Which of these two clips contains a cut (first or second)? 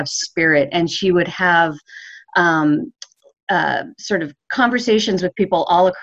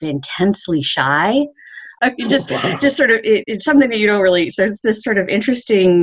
second